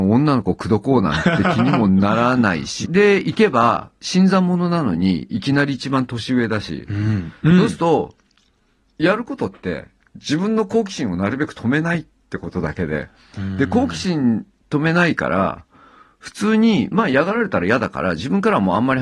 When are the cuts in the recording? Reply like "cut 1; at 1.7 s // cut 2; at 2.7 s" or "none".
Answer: cut 1; at 2.8 s